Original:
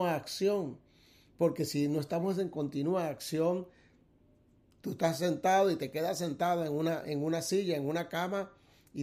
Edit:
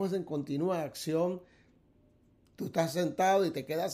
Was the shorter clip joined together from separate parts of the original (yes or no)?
no